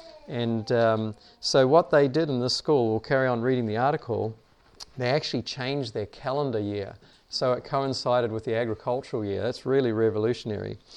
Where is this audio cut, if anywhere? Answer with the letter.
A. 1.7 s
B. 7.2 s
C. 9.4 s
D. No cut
D